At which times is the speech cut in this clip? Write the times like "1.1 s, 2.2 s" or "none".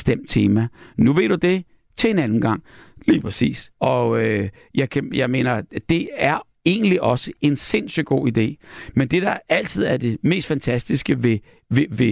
3.8 s